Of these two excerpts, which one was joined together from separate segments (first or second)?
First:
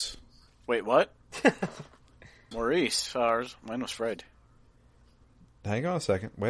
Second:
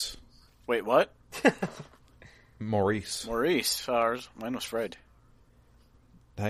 first